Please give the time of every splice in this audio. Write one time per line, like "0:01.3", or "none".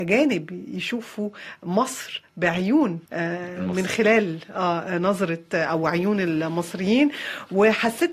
0:03.1